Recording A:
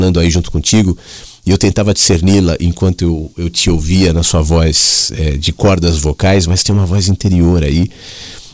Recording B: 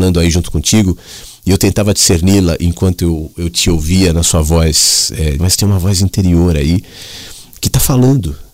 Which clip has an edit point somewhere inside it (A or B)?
B